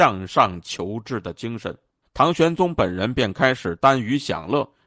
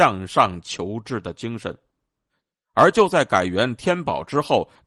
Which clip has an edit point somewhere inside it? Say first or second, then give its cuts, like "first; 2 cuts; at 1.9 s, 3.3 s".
first; 1 cut; at 2.0 s